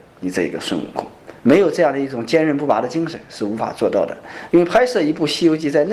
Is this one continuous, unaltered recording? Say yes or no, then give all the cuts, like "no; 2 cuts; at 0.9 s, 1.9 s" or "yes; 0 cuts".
no; 2 cuts; at 1.4 s, 4.5 s